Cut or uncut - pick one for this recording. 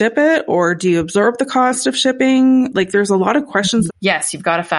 cut